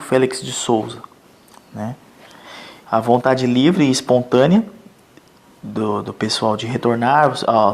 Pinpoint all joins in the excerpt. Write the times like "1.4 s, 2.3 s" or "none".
2.8 s